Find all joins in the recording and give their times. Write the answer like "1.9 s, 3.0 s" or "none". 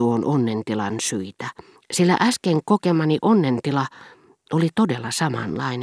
1.8 s